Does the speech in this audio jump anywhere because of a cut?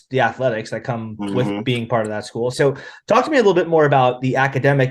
yes; 1 cut; at 2.5 s

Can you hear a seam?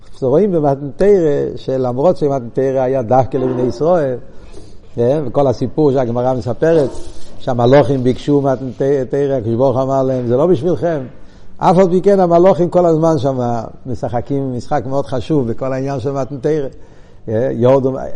no; 0 cuts

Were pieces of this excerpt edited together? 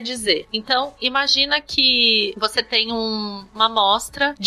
no; 0 cuts

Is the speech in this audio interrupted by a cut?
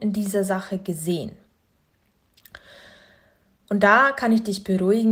no; 0 cuts

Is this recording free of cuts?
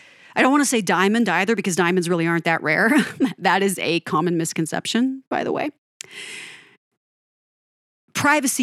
yes; 0 cuts

